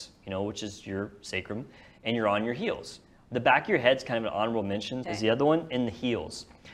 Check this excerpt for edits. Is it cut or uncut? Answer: cut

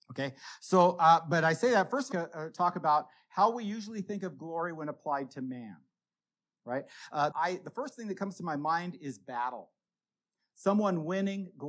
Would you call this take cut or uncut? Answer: cut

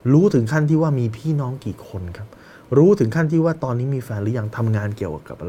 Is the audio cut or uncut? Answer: uncut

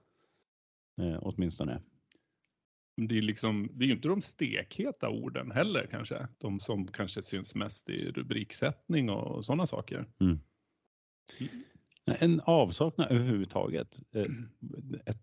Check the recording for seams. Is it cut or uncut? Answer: cut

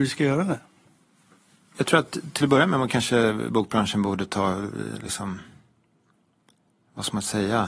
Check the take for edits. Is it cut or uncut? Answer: uncut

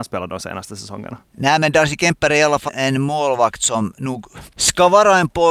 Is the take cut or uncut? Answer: cut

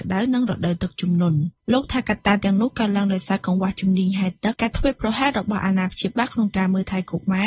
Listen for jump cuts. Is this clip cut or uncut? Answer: cut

